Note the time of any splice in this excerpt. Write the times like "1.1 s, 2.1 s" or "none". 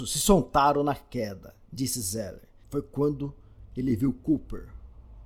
2.6 s

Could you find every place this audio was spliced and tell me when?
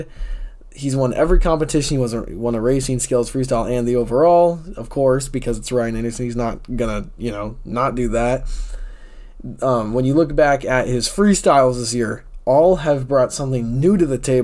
none

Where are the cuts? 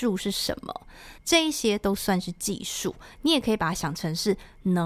1.2 s

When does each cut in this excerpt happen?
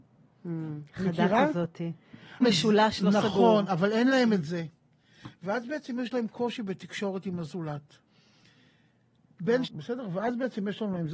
2.4 s, 9.6 s

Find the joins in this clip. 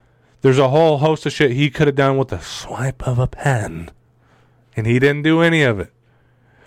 none

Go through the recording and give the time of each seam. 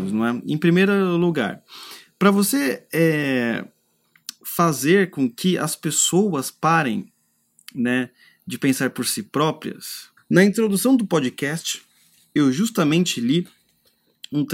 10.2 s

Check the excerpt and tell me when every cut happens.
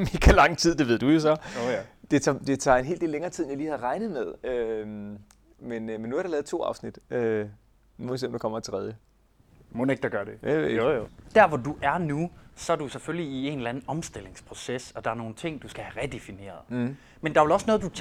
none

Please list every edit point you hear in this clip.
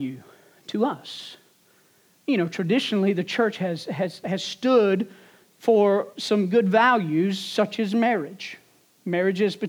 none

